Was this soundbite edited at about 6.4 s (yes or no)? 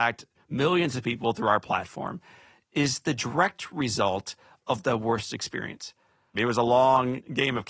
yes